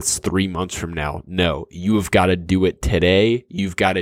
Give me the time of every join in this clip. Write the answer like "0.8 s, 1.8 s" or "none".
none